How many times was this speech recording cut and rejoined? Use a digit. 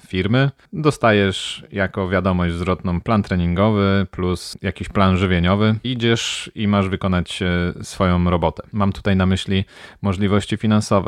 2